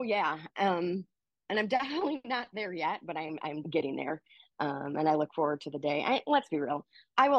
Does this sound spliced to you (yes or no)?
yes